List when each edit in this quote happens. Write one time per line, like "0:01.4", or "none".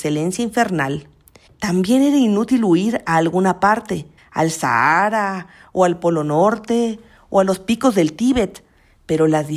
0:01.5
0:04.2